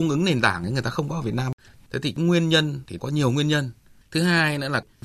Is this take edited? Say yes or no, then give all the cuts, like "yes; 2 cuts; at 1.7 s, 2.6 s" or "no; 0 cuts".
yes; 2 cuts; at 1.9 s, 4.0 s